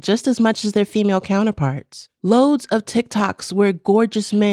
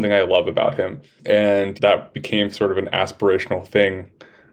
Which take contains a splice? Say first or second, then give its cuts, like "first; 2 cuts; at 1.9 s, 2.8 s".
first; 1 cut; at 2.2 s